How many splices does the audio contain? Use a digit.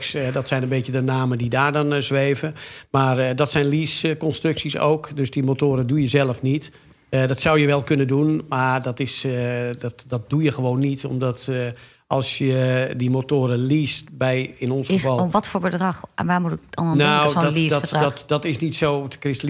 0